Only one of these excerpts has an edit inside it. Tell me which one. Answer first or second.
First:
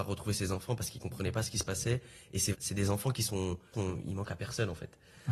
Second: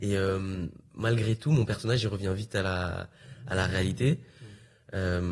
first